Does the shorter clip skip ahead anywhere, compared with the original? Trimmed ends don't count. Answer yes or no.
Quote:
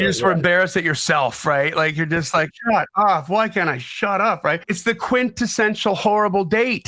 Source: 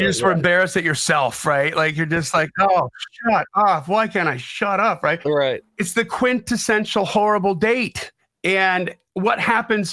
yes